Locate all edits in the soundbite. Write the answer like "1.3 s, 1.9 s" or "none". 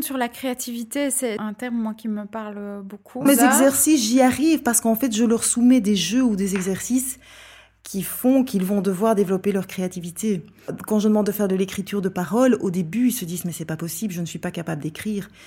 3.3 s